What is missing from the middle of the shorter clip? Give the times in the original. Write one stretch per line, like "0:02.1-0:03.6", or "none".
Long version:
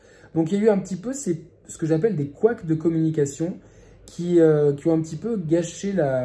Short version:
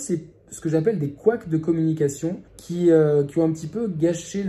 0:03.6-0:04.0

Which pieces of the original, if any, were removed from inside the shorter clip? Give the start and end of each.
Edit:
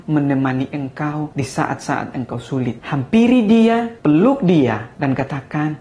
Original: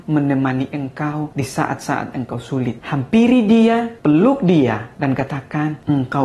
none

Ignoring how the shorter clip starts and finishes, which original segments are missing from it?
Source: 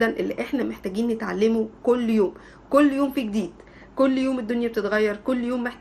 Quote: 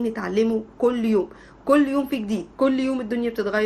0:03.6-0:03.9

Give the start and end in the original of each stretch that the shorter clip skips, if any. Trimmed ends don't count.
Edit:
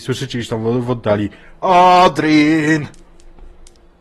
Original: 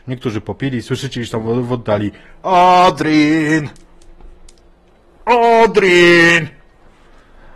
none

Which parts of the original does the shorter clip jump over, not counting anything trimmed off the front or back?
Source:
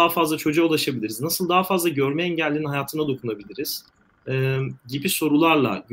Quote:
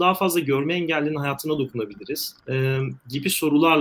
0:03.9-0:04.2

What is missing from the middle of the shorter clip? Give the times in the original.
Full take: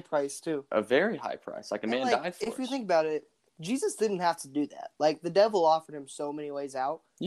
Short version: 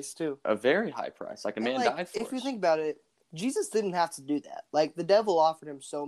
none

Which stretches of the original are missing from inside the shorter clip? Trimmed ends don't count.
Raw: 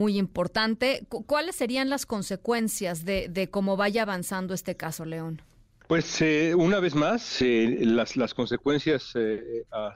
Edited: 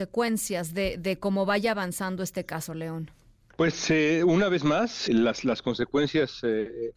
0:07.4-0:07.8

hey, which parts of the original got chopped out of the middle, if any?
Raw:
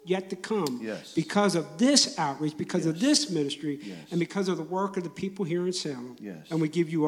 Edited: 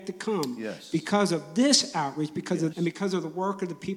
0:02.9-0:04.1

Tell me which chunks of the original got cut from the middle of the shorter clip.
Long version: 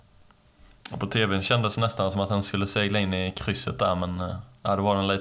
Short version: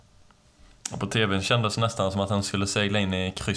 none

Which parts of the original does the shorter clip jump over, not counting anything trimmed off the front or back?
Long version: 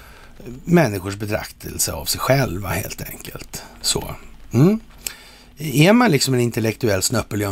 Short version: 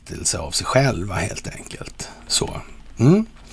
none

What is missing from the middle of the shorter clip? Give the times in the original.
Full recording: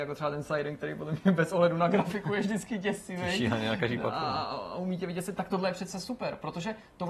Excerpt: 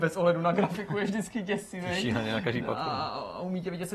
none

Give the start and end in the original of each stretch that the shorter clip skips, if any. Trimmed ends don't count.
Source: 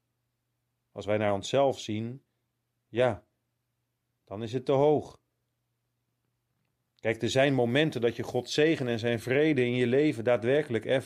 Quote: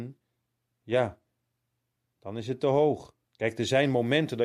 0:05.3-0:06.9

